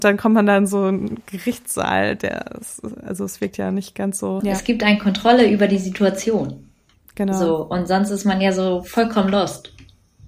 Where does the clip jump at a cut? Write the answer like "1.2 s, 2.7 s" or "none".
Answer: 4.4 s

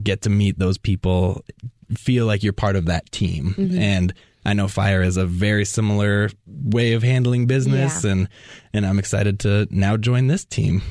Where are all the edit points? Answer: none

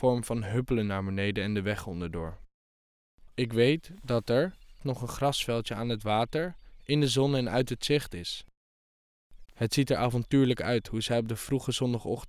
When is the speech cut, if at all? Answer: 3.3 s, 4.8 s, 9.4 s

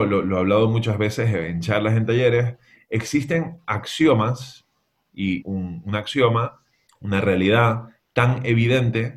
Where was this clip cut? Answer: 5.4 s, 6.9 s

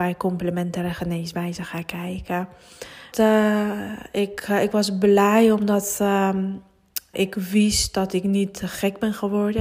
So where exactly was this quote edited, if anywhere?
3.1 s, 7.1 s

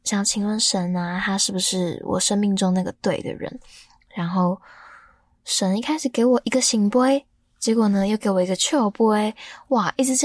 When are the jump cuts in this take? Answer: none

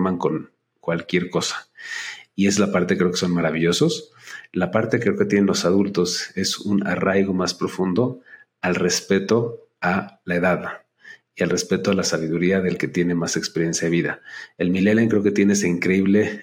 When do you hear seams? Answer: none

